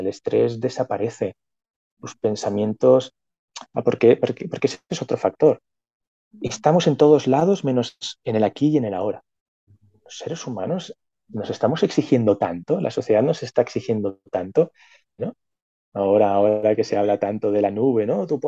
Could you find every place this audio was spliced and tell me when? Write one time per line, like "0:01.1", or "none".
0:15.2

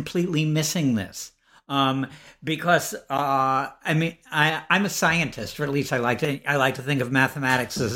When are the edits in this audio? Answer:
none

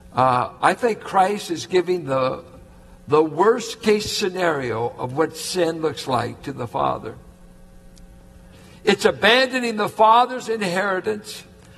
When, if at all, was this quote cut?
none

